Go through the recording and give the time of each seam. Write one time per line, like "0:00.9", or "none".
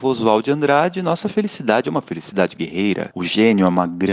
0:03.1